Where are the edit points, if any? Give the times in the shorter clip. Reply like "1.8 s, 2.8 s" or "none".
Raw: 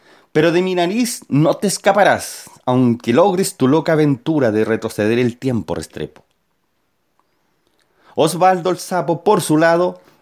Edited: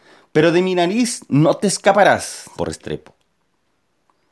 2.6 s